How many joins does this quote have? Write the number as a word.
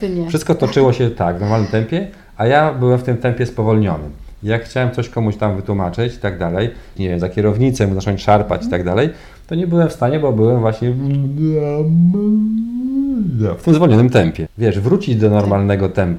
two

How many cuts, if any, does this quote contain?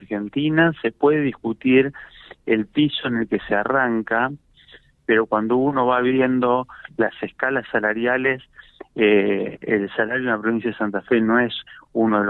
zero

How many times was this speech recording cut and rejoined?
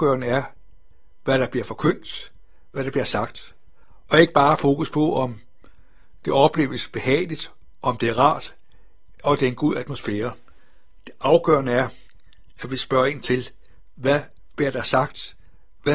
zero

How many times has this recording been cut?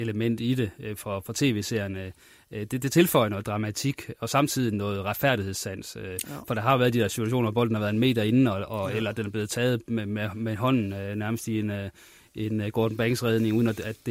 zero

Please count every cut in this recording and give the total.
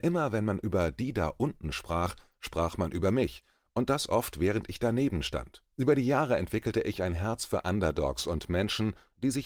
one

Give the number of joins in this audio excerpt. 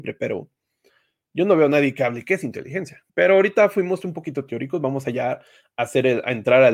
one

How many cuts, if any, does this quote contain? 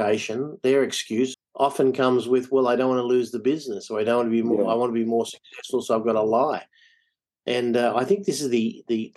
one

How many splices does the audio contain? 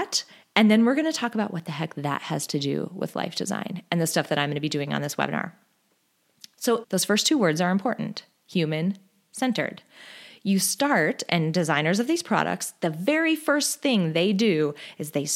one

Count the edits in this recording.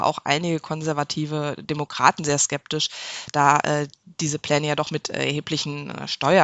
zero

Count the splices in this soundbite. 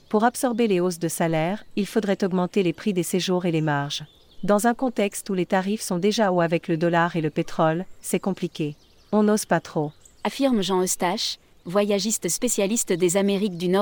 one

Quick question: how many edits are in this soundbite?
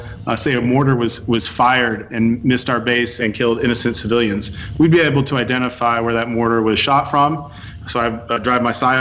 one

